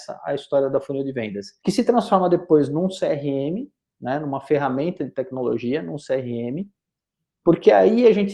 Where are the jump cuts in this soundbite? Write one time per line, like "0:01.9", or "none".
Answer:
0:01.6